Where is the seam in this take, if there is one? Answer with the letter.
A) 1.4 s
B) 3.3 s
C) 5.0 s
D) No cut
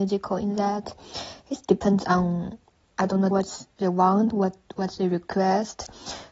B